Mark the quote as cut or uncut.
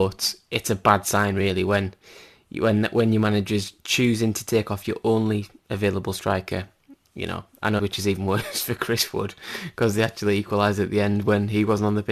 cut